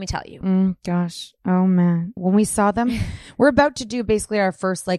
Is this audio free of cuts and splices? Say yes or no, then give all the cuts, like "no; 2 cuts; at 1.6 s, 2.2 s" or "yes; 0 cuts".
no; 1 cut; at 2.2 s